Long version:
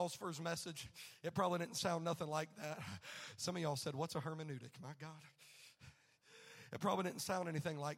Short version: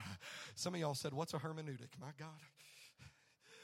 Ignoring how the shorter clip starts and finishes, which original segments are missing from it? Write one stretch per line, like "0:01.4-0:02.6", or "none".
none